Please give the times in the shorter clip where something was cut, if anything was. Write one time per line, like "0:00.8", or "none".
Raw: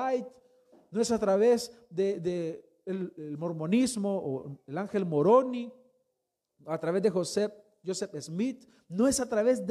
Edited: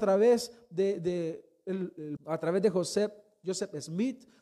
0:02.2